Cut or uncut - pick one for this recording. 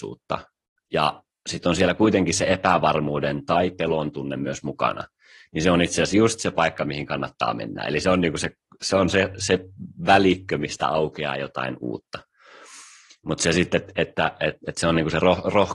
uncut